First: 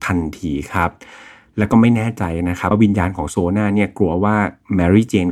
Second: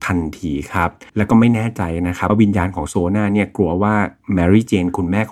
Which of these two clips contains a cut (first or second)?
second